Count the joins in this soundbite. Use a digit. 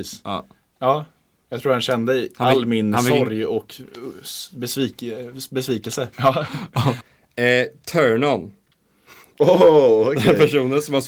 1